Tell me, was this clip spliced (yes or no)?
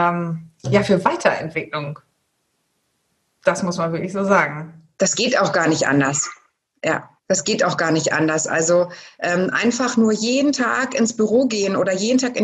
yes